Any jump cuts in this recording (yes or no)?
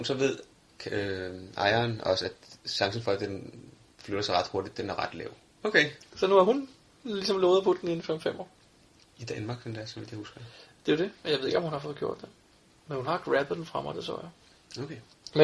yes